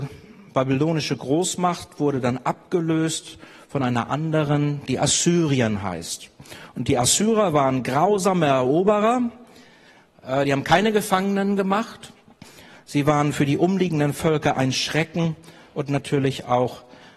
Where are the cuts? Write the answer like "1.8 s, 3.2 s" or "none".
none